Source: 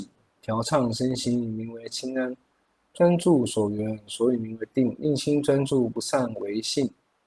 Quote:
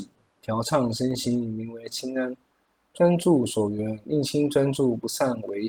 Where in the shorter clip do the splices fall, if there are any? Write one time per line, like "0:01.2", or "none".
0:04.0